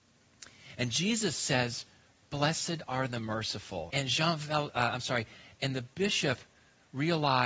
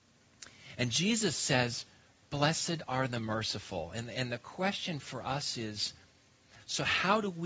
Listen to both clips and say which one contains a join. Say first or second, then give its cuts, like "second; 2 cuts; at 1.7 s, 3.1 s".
first; 1 cut; at 3.9 s